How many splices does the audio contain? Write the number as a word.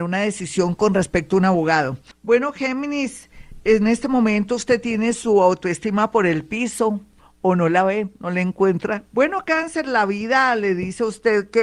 two